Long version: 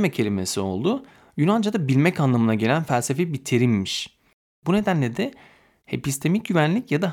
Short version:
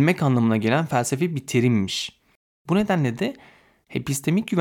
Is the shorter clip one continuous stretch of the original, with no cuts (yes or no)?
yes